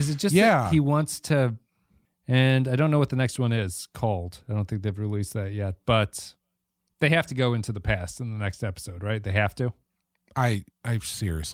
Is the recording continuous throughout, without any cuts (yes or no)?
no